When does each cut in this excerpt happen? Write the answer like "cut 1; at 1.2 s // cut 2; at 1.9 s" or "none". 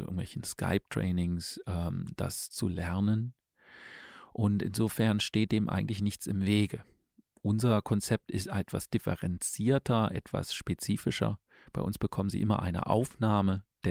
none